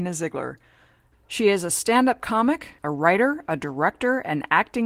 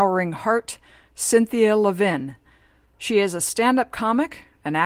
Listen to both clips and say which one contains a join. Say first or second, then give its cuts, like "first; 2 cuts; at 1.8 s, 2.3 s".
first; 2 cuts; at 1.1 s, 2.8 s